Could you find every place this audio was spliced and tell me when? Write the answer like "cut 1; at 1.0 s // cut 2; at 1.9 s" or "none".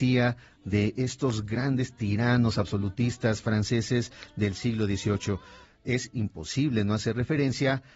cut 1; at 5.6 s